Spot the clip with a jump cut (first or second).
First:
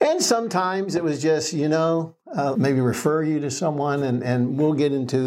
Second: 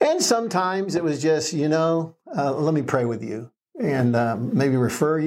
first